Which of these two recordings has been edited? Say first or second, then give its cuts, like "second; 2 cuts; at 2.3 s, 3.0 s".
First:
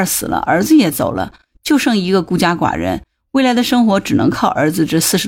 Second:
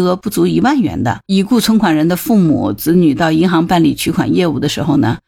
second; 1 cut; at 1.2 s